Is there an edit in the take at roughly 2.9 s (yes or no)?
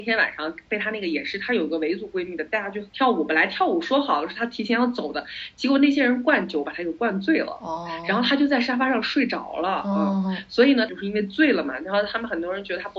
yes